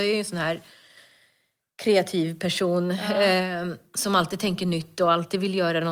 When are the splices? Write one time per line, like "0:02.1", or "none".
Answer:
none